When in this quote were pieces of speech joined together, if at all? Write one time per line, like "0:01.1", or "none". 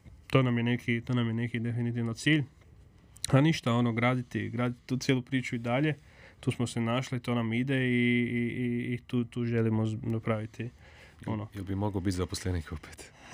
none